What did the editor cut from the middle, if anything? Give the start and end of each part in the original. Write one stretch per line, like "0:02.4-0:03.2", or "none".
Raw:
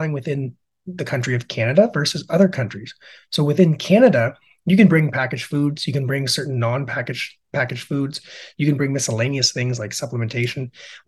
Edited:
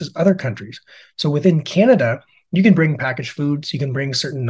none